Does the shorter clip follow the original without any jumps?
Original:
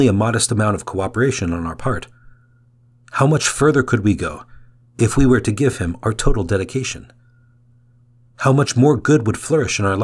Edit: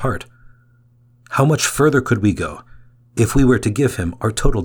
yes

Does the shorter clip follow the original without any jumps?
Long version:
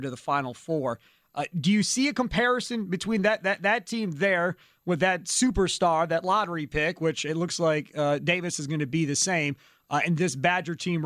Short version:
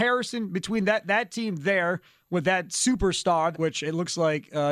no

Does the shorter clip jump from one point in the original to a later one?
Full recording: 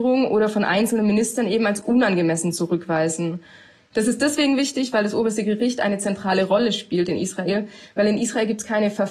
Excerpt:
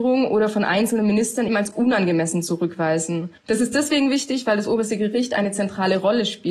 yes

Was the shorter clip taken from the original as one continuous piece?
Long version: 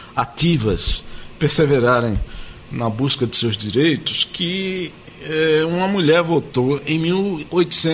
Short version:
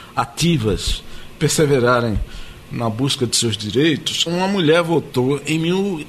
no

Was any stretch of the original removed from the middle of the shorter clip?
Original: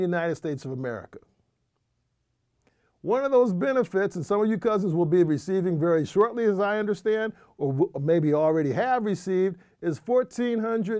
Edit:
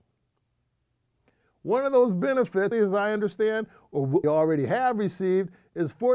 yes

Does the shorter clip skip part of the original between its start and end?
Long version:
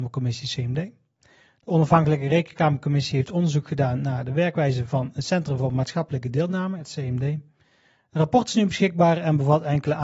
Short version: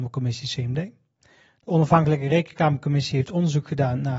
no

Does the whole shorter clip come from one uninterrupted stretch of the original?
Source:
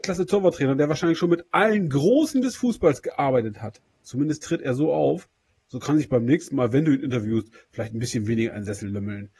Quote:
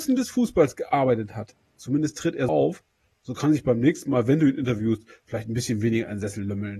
no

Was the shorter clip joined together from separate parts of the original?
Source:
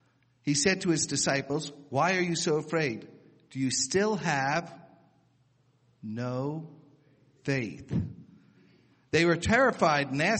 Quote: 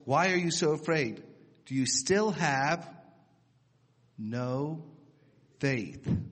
no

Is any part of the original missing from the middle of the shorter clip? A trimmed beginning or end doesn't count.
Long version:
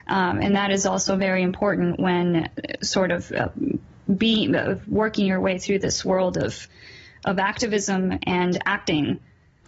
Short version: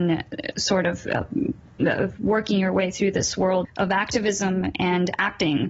yes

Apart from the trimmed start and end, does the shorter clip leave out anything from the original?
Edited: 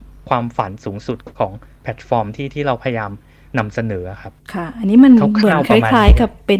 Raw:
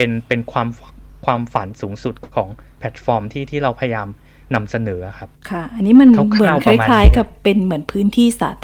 no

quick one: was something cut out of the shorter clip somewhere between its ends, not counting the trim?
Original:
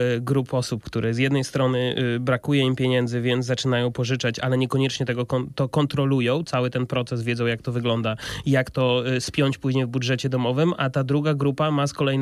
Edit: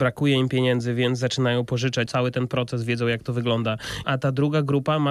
yes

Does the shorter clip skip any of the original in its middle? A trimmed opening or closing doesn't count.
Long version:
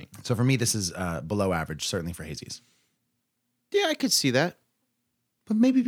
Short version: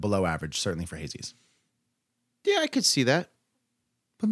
no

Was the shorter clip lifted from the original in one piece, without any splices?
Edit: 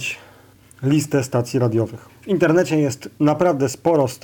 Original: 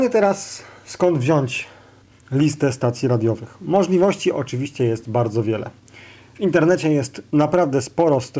no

